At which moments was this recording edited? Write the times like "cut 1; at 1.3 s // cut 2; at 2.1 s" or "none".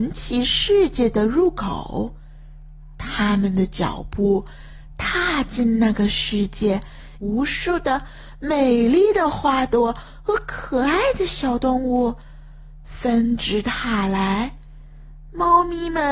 cut 1; at 7.2 s